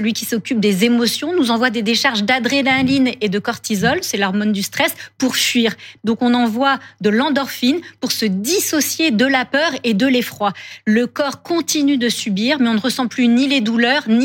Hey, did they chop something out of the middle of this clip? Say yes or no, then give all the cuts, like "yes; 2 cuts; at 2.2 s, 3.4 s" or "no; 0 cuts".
yes; 1 cut; at 6.0 s